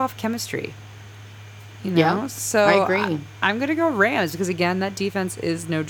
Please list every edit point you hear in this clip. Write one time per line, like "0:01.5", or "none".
none